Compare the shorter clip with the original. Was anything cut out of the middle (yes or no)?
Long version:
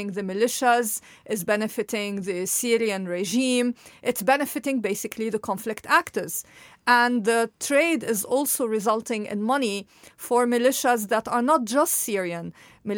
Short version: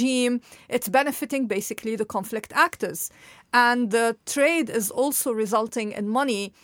no